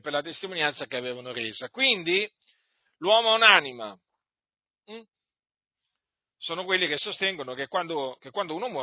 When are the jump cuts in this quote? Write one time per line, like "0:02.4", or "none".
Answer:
0:04.8